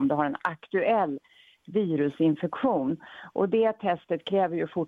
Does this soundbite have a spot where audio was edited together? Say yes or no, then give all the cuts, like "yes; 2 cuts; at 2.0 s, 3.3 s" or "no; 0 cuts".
no; 0 cuts